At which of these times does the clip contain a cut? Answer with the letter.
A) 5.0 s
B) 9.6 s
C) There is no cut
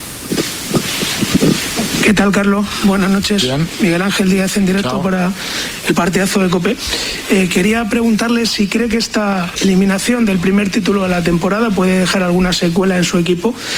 B